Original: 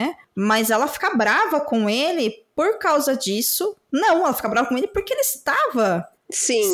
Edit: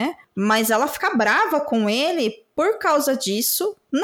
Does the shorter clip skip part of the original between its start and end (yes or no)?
no